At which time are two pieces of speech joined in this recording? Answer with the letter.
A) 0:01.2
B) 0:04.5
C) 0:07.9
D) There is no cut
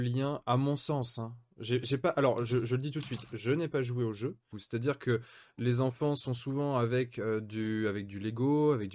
B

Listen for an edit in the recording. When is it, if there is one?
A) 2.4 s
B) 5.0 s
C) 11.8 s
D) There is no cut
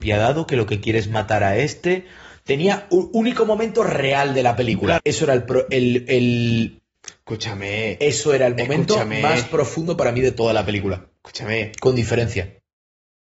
B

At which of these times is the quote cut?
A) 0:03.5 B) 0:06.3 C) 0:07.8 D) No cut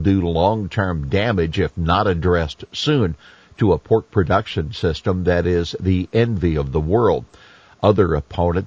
D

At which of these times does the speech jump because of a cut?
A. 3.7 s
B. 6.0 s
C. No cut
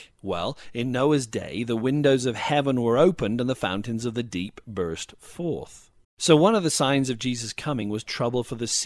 B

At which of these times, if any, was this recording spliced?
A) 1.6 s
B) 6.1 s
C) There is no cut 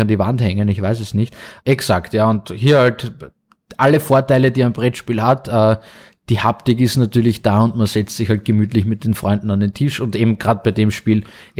A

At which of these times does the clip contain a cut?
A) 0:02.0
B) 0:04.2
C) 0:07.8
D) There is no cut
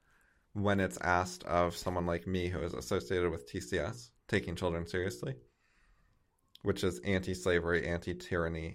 D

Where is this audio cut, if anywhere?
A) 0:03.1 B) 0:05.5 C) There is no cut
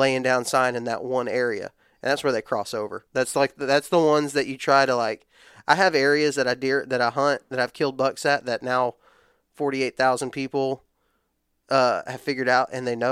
A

